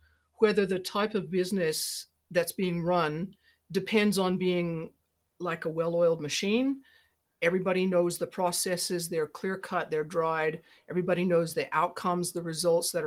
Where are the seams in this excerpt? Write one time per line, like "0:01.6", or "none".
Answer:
none